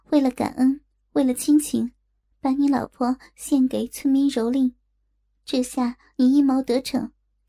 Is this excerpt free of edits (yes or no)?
yes